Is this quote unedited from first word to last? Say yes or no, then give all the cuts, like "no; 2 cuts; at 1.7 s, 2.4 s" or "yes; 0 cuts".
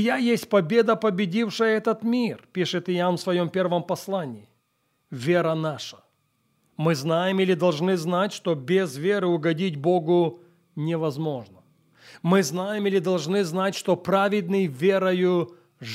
yes; 0 cuts